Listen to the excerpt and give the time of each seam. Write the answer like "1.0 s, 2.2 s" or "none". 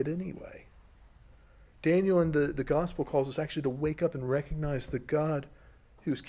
none